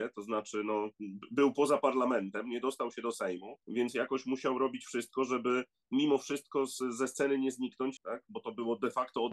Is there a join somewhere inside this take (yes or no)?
yes